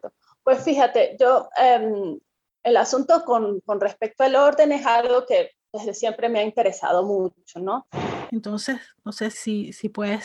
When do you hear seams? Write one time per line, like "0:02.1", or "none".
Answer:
0:08.3
0:09.3